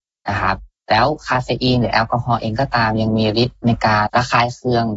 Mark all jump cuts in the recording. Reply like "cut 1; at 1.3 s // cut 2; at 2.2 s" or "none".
cut 1; at 4.1 s